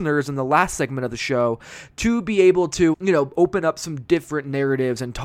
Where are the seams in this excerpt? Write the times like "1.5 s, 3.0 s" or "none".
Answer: 2.9 s